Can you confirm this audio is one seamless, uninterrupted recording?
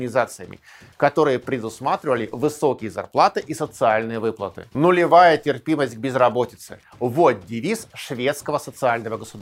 no; 1 cut; at 4.7 s

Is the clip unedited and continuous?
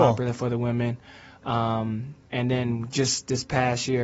yes; 0 cuts

